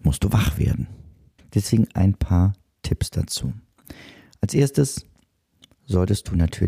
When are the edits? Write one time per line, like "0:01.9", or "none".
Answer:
0:01.4